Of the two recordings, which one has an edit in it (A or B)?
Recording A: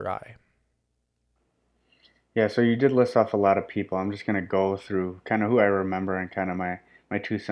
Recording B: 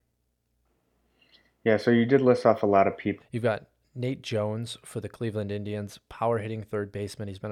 B